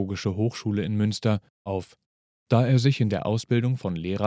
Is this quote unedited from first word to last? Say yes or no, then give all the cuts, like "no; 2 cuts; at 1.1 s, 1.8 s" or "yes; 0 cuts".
no; 1 cut; at 1.7 s